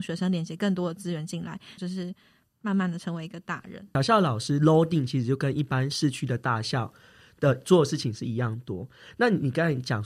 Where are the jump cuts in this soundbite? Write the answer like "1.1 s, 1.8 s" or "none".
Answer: 1.8 s